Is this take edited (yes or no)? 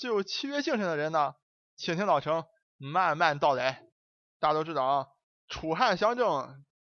no